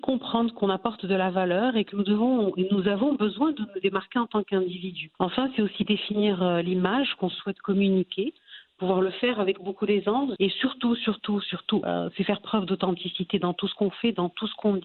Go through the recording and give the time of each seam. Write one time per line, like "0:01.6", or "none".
0:10.4
0:11.8